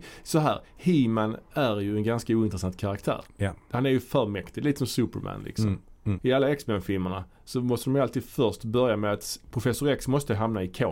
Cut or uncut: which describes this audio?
cut